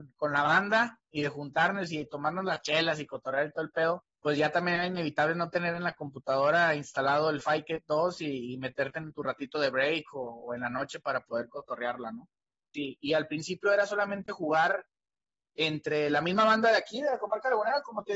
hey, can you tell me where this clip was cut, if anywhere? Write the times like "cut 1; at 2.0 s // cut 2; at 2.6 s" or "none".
cut 1; at 4.1 s // cut 2; at 12.7 s

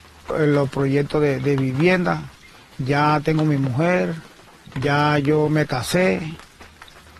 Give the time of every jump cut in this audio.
cut 1; at 2.7 s

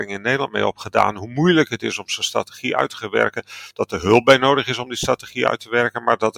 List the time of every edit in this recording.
none

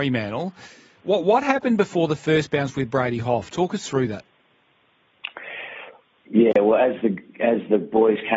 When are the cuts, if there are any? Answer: none

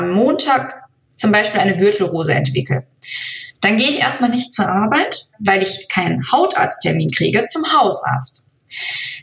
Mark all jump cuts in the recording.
cut 1; at 5.3 s

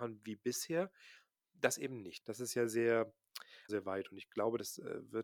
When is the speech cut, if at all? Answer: cut 1; at 2.2 s // cut 2; at 3.7 s

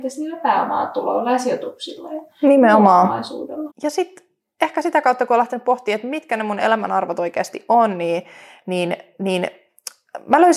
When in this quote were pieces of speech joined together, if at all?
cut 1; at 3.7 s

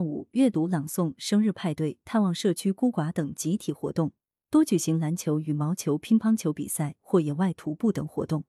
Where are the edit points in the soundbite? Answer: none

